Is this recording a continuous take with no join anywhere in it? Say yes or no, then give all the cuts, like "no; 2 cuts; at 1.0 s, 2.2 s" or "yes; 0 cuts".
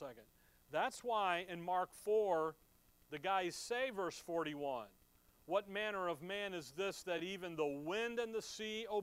yes; 0 cuts